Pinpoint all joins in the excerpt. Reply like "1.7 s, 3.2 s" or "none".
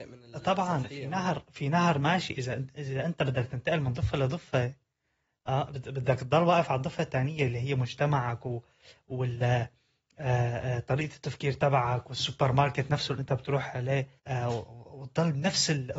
14.2 s